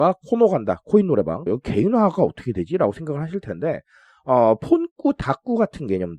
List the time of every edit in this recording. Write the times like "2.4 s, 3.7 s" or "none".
1.5 s